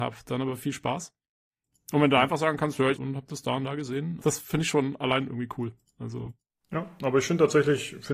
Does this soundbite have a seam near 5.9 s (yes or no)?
no